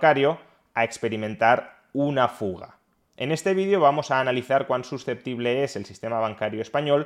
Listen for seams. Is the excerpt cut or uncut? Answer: cut